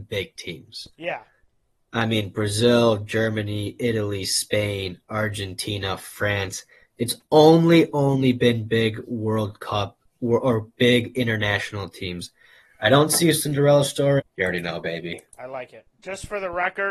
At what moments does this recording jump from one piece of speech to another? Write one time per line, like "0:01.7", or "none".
0:14.2